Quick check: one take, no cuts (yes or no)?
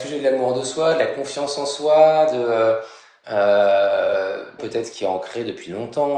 no